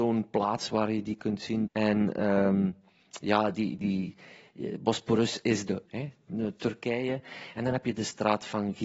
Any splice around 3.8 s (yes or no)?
yes